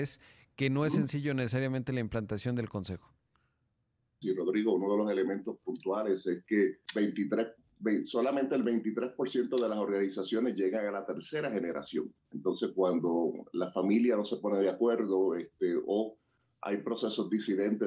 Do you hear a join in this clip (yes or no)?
yes